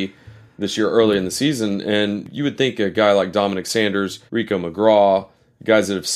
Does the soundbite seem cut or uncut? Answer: cut